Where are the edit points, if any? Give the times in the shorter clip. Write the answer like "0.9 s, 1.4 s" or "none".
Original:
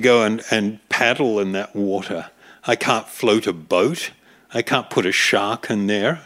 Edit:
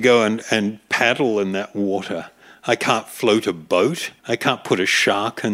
4.2 s